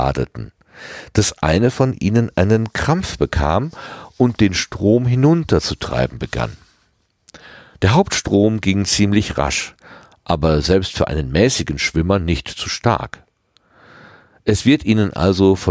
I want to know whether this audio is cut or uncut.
uncut